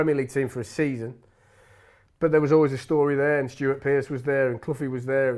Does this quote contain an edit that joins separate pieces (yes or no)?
no